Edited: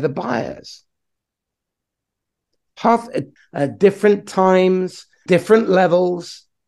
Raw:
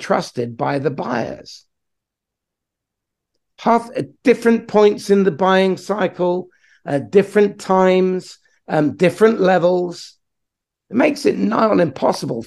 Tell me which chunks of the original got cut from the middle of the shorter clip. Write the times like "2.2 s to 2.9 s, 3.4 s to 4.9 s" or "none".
4.2 s to 6.7 s, 8.6 s to 9.0 s